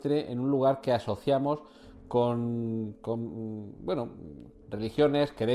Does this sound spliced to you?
no; 0 cuts

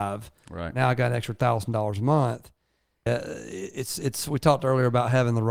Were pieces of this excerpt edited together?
yes; 1 cut; at 3.1 s

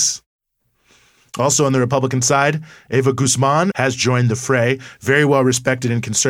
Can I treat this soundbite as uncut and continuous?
no; 1 cut; at 3.7 s

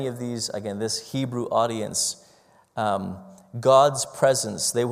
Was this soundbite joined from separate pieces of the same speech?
no; 0 cuts

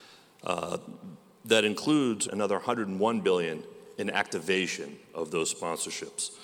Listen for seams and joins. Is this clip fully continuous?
no; 1 cut; at 2.3 s

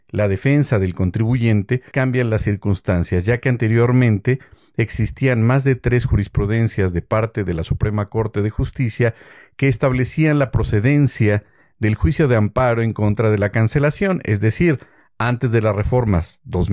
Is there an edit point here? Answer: yes; 1 cut; at 1.9 s

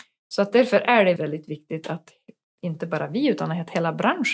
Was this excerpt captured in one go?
no; 1 cut; at 1.2 s

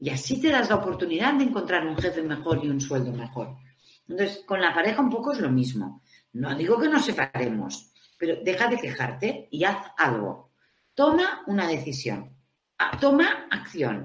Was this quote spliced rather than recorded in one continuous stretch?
no; 0 cuts

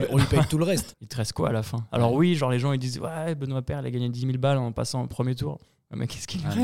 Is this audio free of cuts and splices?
no; 1 cut; at 0.9 s

